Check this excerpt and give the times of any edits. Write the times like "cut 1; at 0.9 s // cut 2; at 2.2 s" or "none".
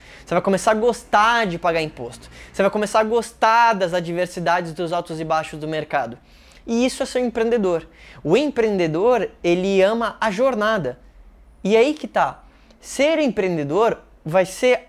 none